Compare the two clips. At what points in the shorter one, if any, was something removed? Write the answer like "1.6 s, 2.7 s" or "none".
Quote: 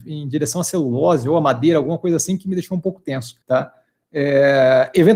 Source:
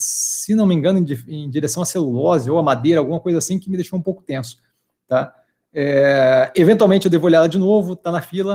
3.4 s